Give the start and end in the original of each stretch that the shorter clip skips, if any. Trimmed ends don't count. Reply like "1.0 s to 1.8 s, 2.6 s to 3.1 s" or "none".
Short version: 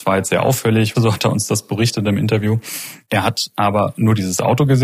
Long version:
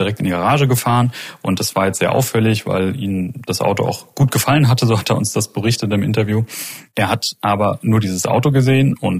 2.6 s to 4.8 s

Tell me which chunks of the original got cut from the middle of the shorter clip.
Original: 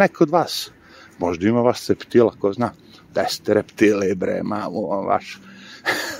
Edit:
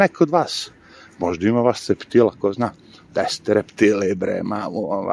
none

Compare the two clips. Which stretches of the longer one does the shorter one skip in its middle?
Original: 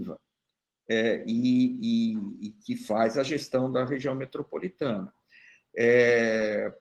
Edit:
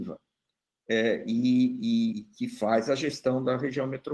2.1 s to 2.4 s

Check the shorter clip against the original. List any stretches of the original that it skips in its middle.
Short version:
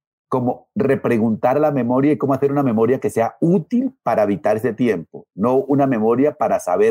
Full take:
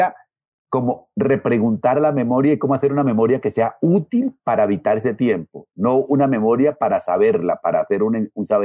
none

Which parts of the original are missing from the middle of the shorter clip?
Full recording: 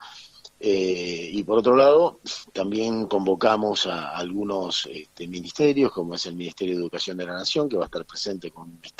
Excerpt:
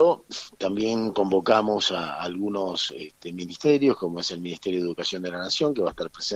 none

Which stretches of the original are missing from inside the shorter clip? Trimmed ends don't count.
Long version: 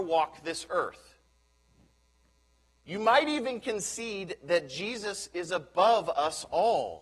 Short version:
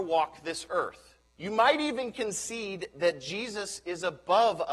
1.3 s to 2.7 s

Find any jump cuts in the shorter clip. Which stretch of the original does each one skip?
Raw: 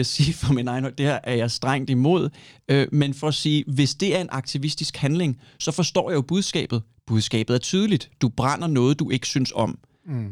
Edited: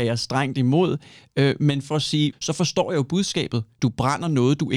3.6 s to 5.5 s, 7.0 s to 8.2 s

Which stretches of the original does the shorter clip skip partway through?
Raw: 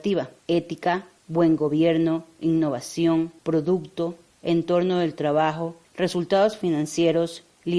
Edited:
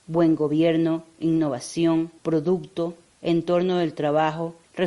none

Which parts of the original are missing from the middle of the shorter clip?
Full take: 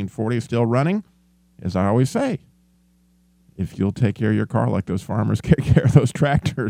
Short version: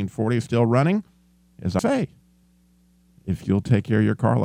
1.8 s to 2.1 s

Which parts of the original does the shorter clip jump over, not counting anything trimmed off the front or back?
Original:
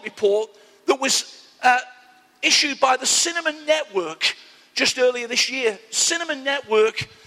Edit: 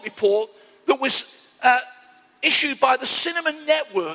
none

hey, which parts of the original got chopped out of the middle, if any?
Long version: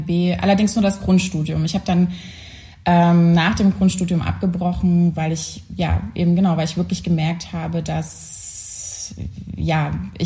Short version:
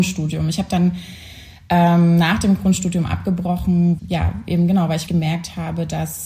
5.1 s to 5.7 s, 6.7 s to 7.0 s

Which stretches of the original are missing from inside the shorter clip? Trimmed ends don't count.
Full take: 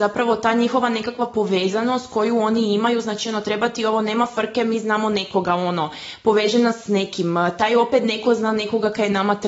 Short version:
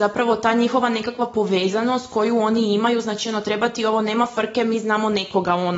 none

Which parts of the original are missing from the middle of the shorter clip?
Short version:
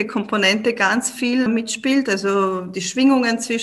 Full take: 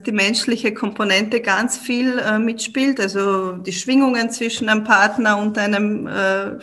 2.1 s to 2.4 s

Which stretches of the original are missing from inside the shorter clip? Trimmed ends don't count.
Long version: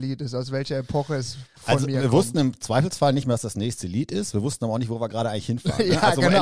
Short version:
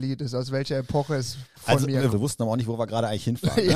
2.1 s to 4.3 s

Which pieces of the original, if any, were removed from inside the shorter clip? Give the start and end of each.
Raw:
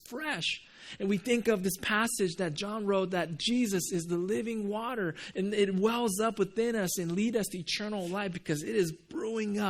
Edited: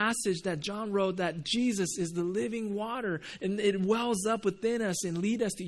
none

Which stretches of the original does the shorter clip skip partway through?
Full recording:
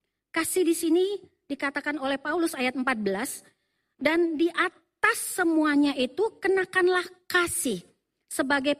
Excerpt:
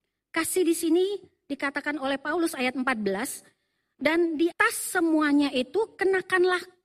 4.5 s to 5.0 s

